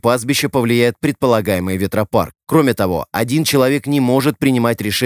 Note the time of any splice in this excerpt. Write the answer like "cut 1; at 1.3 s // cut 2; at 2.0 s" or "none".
none